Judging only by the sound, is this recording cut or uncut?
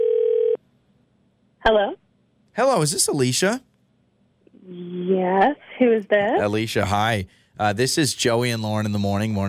uncut